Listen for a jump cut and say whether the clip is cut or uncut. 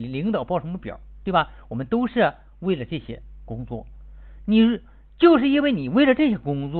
uncut